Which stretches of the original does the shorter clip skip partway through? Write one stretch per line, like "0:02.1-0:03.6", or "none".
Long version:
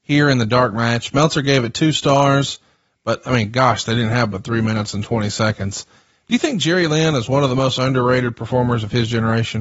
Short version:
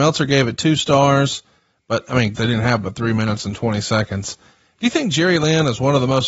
0:03.5-0:03.8